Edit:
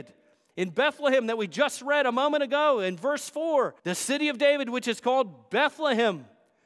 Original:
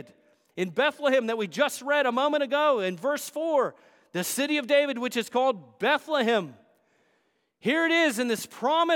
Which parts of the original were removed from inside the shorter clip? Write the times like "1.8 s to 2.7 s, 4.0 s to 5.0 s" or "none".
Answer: 3.8 s to 4.1 s